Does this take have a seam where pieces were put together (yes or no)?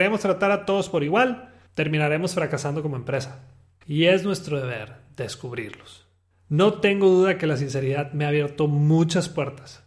yes